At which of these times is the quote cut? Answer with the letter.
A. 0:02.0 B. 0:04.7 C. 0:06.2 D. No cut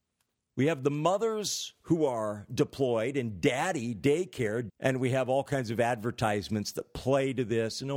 B